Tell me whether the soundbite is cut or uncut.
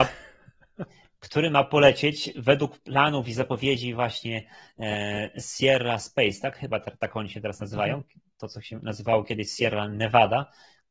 uncut